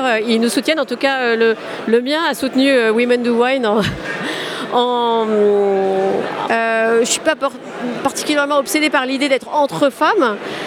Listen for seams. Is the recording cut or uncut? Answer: cut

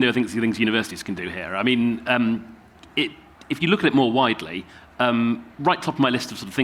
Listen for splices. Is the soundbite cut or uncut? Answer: uncut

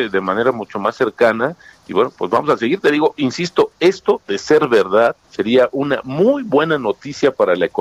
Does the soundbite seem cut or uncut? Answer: cut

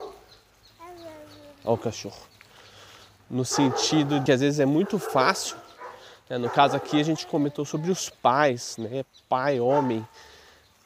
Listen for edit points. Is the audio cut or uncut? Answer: uncut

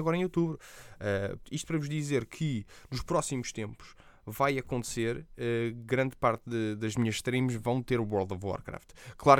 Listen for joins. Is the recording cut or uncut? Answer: cut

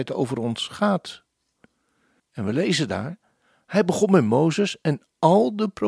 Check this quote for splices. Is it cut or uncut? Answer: cut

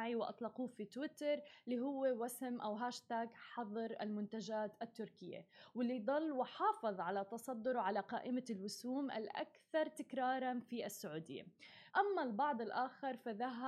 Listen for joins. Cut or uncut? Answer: cut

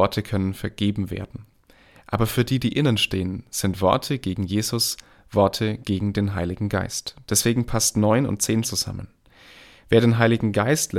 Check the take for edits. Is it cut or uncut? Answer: cut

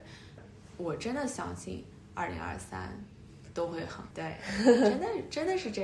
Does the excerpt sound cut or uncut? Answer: cut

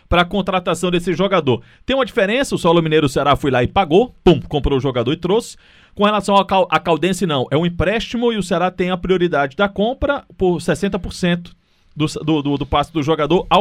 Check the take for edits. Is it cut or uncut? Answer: uncut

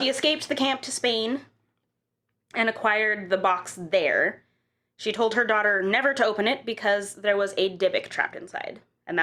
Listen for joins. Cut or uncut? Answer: uncut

